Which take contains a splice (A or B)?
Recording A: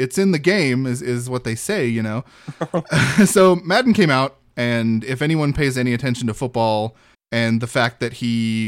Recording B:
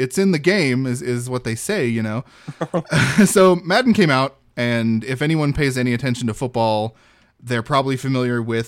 A